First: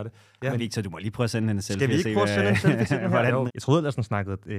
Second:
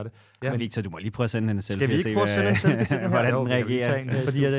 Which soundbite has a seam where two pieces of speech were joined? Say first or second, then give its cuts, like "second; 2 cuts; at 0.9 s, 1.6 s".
first; 1 cut; at 3.5 s